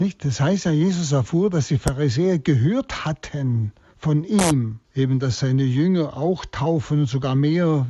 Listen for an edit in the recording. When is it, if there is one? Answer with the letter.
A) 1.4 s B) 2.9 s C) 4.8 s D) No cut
C